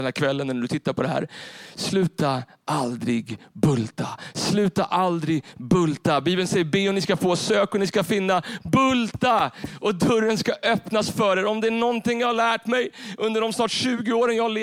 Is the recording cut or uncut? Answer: uncut